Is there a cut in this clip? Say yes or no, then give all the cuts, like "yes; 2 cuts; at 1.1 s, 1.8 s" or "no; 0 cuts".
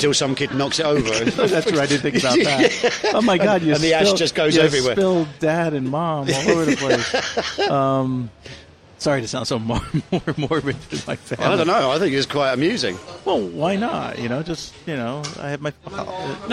no; 0 cuts